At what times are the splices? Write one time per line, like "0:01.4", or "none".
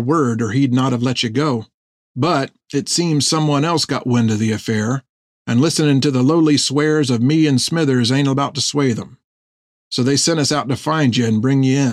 none

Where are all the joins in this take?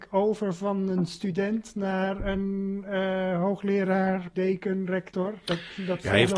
0:04.3

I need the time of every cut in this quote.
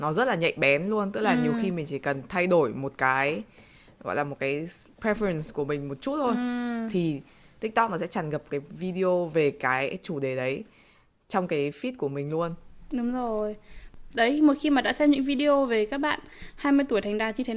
none

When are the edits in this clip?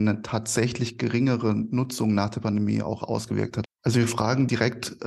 0:03.6

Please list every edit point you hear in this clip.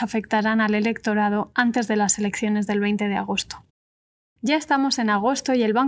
none

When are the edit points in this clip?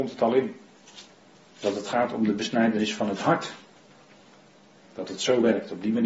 0:04.8

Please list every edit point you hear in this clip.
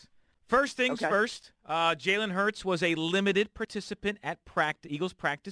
none

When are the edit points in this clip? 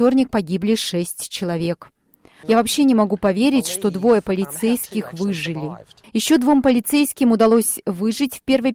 0:02.4
0:06.0

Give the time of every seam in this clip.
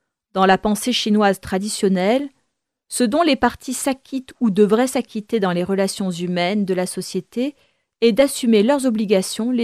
none

